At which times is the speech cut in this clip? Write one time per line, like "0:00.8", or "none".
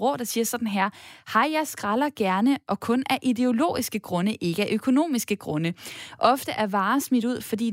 none